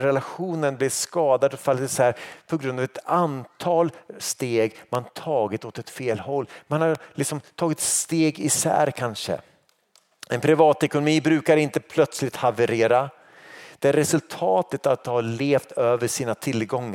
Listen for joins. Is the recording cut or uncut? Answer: uncut